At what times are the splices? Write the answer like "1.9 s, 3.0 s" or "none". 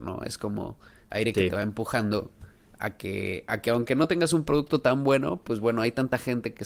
none